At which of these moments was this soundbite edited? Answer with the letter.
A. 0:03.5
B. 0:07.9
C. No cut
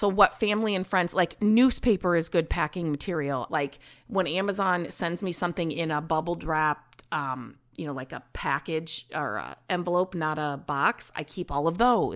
A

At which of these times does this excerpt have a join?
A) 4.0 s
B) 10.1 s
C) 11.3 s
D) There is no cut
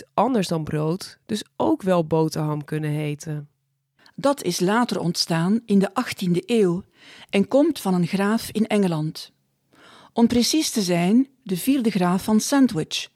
A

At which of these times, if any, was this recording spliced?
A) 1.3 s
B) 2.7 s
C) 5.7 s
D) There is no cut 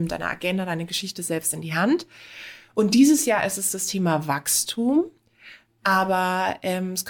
D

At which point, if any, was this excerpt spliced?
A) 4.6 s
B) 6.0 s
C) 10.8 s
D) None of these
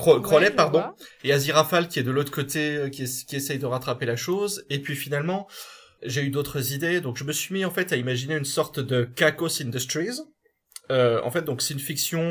B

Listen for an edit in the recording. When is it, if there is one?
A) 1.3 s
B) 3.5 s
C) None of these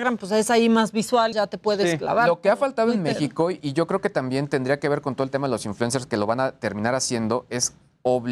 A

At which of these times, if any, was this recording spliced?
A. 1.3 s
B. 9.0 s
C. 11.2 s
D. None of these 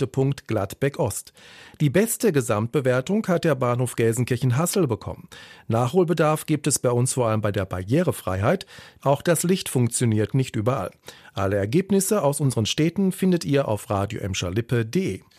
B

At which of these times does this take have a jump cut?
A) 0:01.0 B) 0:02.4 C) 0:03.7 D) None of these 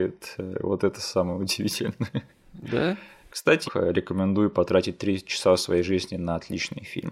C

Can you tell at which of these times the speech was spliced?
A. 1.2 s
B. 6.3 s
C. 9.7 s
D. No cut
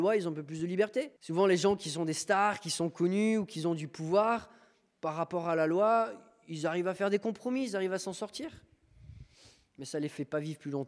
A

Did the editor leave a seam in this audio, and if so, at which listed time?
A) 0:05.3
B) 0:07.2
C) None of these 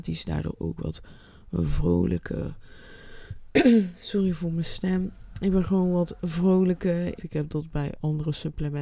B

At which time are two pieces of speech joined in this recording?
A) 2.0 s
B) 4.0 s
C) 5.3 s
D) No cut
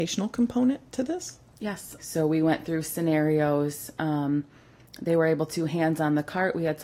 A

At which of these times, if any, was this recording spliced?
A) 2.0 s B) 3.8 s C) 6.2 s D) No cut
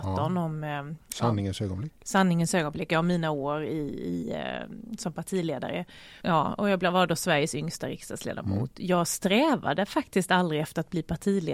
C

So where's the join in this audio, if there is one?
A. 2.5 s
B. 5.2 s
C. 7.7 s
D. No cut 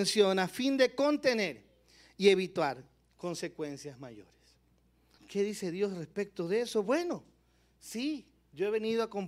B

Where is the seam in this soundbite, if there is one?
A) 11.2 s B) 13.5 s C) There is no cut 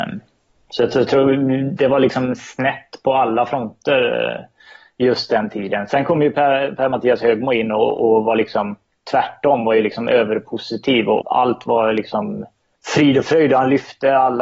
A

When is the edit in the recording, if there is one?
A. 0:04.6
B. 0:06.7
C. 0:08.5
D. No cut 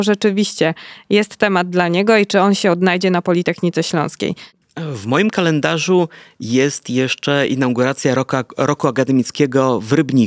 A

